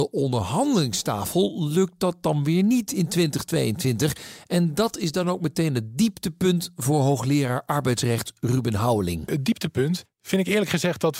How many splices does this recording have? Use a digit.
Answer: 0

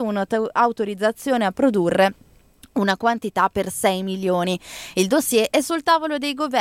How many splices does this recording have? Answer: 0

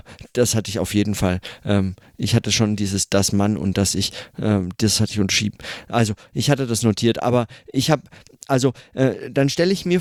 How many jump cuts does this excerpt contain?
0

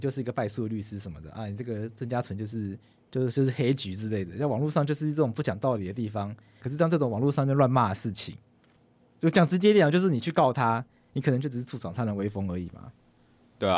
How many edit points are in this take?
1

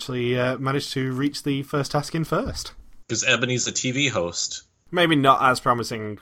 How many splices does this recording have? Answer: 2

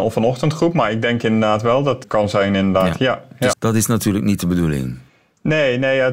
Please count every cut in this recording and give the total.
2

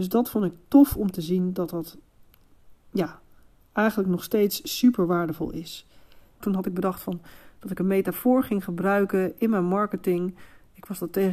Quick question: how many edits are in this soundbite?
1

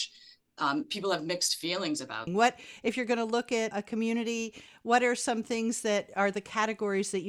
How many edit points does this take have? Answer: 2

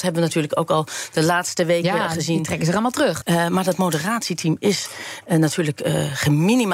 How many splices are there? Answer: 1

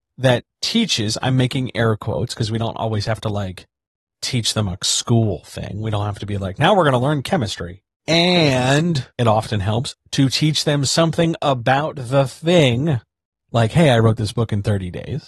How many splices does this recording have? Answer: 2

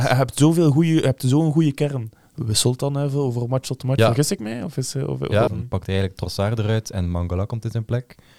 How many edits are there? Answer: 2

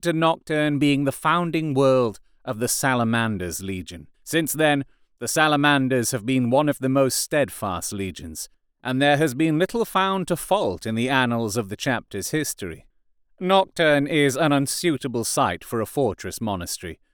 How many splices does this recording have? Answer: 1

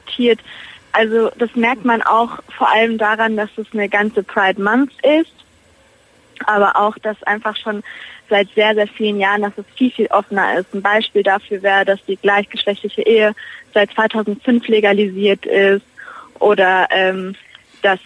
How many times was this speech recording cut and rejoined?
0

